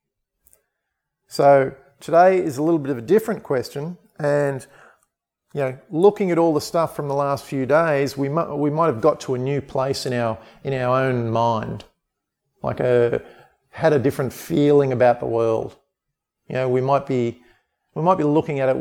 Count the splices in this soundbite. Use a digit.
0